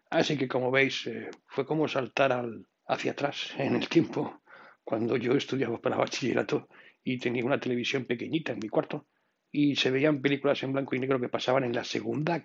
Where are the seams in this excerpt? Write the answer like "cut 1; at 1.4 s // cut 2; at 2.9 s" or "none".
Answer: cut 1; at 1.4 s // cut 2; at 2.7 s

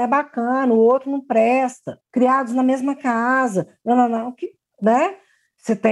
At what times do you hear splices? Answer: none

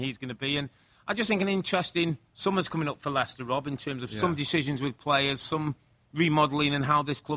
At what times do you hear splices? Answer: cut 1; at 2.3 s

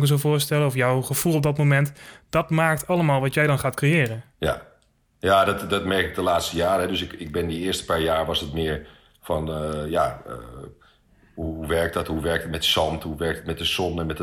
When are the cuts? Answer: none

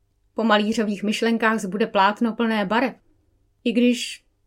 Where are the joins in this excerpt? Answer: cut 1; at 3.5 s

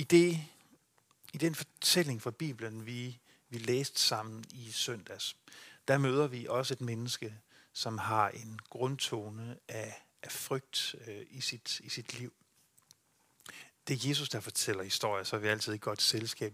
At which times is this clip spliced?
none

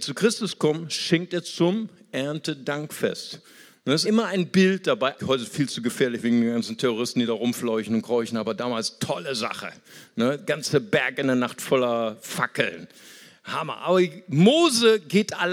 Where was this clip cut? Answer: cut 1; at 4.0 s // cut 2; at 5.2 s

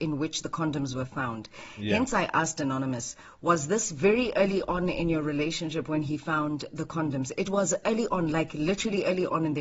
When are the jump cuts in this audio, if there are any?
none

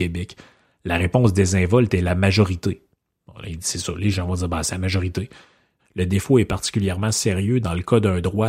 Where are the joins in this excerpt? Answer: cut 1; at 5.8 s

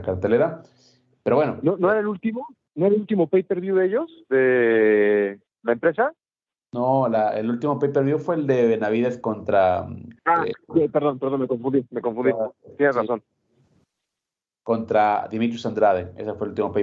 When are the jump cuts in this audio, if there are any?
cut 1; at 10.2 s

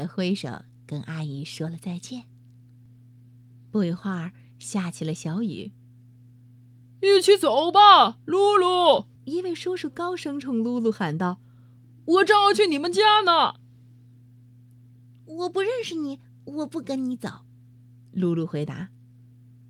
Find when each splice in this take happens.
cut 1; at 9.2 s

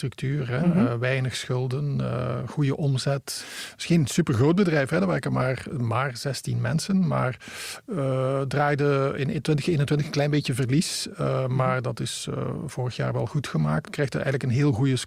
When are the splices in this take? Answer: cut 1; at 13.9 s

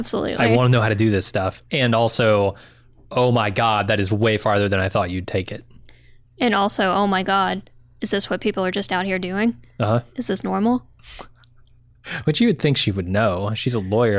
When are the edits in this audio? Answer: none

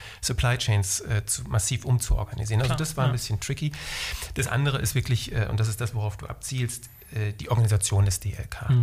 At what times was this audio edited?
none

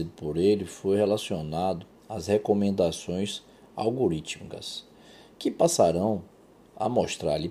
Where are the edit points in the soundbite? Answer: none

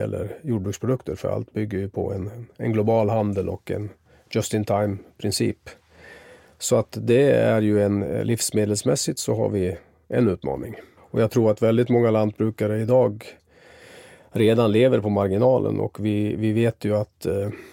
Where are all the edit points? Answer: cut 1; at 11.0 s

